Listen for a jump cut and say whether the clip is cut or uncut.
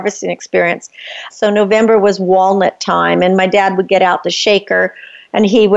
cut